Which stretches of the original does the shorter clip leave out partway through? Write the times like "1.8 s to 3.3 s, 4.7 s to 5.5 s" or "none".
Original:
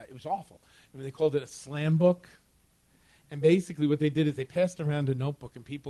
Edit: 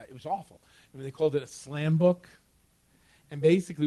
none